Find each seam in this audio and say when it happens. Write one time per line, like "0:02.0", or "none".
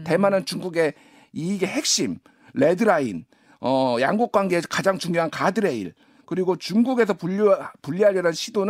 none